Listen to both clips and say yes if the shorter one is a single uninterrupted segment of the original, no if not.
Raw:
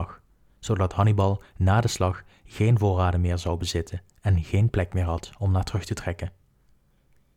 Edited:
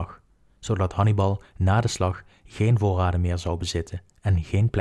yes